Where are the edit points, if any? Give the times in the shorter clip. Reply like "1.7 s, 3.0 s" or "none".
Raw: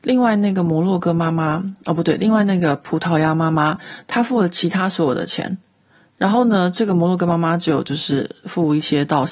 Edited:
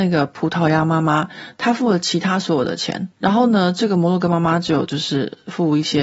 3.1 s

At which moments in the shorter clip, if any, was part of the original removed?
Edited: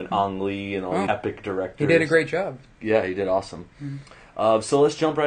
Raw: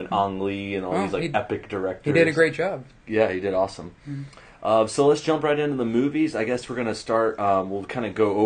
1.1 s

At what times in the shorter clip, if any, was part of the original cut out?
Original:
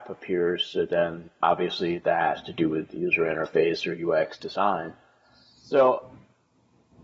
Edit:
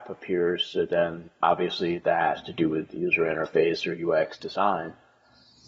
none

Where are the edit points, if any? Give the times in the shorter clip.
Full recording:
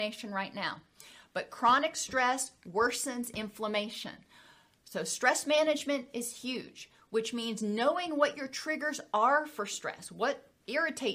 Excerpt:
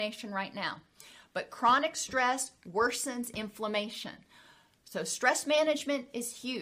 none

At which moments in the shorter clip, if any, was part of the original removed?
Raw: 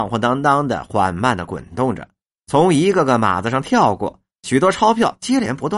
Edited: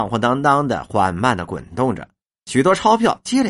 2.3 s

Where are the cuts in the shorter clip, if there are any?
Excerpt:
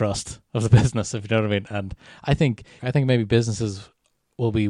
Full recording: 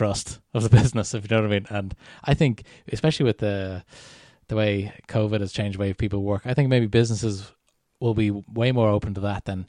2.8 s

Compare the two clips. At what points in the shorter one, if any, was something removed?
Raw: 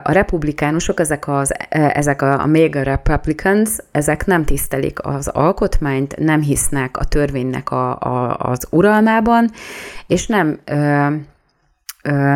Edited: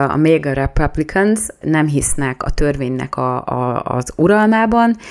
1.6 s

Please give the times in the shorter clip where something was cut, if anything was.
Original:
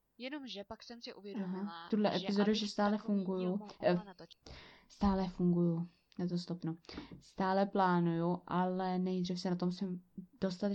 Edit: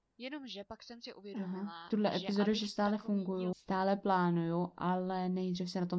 3.5 s

